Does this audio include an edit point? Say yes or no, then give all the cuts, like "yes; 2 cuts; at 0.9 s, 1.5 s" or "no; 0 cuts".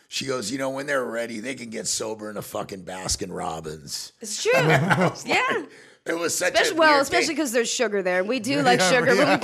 no; 0 cuts